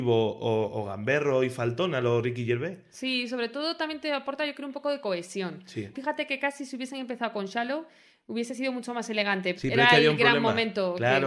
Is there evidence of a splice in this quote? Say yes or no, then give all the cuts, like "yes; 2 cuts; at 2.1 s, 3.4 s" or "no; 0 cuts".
yes; 2 cuts; at 5.9 s, 9.5 s